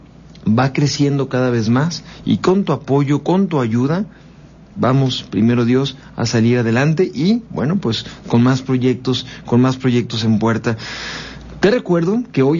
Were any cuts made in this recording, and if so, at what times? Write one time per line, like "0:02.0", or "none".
none